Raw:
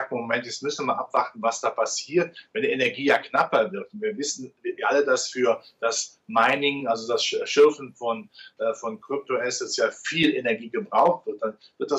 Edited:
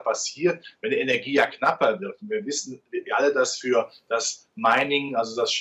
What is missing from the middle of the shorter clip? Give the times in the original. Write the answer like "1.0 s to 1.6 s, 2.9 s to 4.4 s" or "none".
none